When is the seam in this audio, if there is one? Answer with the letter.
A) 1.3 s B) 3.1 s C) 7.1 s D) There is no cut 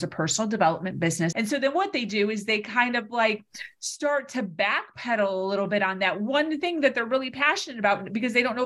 A